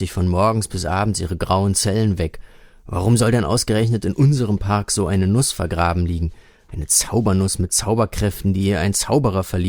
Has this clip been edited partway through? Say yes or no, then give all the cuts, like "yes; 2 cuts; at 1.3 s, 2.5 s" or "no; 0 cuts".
no; 0 cuts